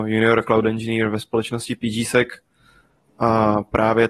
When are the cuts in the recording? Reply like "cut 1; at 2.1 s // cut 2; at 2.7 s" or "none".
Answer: none